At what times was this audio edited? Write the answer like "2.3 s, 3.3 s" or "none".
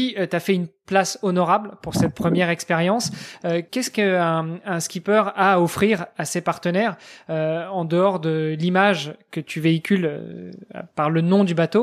none